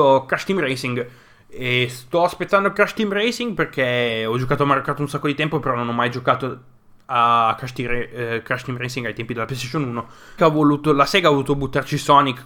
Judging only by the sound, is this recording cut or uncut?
cut